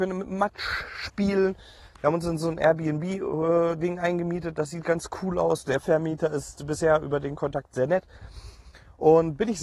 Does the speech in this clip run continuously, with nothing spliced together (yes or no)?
yes